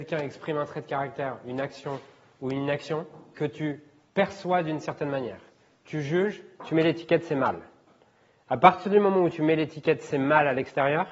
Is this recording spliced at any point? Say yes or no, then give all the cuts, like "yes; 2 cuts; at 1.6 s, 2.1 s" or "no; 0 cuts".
no; 0 cuts